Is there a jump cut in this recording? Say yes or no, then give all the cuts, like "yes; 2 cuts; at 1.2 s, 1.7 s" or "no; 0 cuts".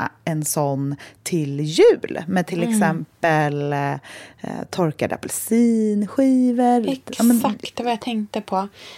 no; 0 cuts